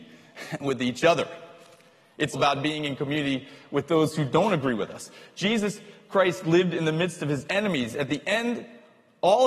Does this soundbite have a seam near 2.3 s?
yes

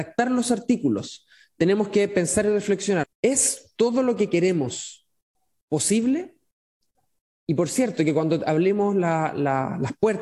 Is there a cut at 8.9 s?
no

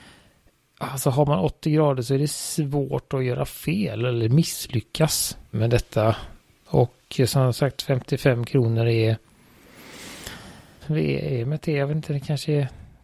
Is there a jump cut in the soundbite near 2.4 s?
no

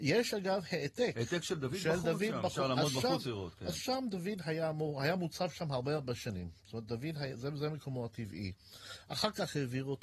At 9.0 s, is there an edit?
no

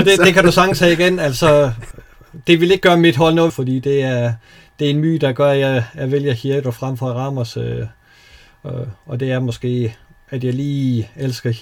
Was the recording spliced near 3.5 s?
yes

